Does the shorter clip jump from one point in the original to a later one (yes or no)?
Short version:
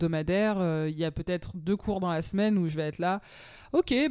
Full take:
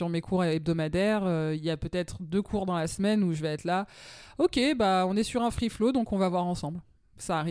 no